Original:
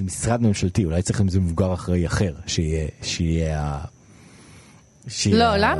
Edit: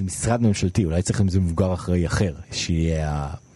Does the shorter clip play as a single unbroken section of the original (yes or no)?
no